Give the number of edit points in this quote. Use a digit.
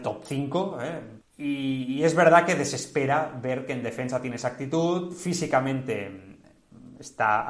1